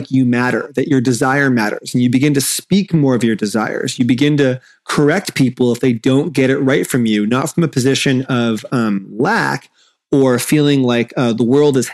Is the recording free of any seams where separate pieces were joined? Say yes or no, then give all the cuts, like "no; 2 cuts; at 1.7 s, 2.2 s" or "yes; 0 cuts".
yes; 0 cuts